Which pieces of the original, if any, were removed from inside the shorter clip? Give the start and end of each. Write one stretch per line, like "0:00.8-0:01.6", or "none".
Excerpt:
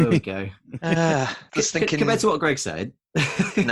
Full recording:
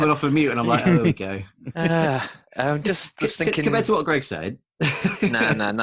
0:02.4-0:03.1

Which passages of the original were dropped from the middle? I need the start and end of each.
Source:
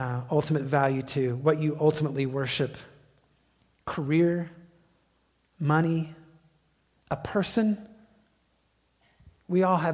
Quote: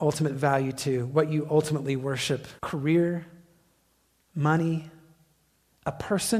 0:02.9-0:03.8

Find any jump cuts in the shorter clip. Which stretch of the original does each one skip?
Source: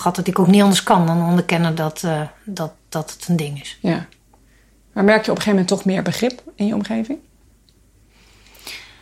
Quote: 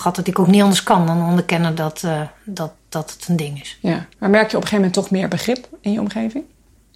0:04.1-0:04.9

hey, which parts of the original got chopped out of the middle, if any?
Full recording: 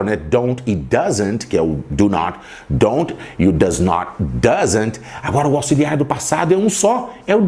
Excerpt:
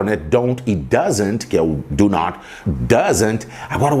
0:02.6-0:04.2

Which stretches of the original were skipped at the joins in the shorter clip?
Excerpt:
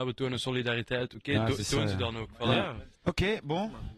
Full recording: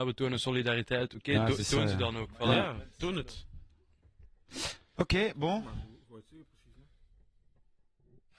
0:03.0-0:04.9

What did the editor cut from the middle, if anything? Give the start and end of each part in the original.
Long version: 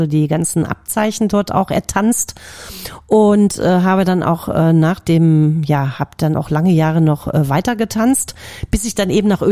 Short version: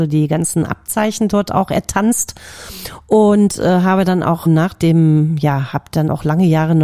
0:04.5-0:04.7

